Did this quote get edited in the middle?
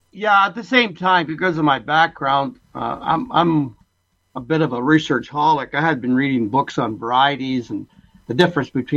no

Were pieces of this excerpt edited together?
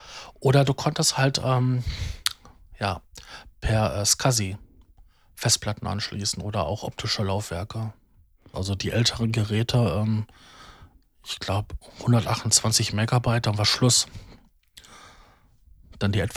yes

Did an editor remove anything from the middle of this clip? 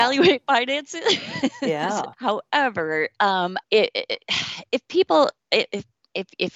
yes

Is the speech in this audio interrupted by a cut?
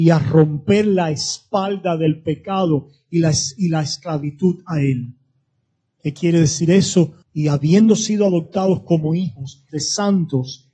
yes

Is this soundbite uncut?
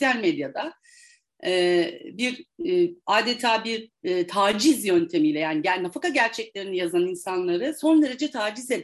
yes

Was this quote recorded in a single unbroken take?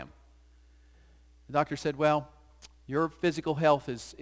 yes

